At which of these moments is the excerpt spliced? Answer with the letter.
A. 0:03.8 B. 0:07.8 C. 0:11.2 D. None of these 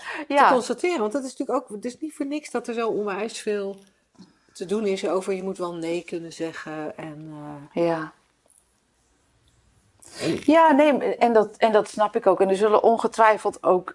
C